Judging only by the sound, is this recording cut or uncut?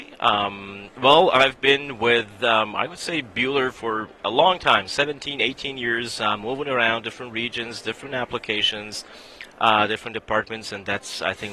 uncut